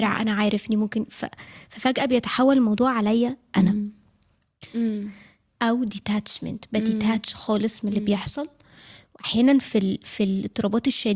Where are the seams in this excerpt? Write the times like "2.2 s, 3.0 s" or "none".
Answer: 4.7 s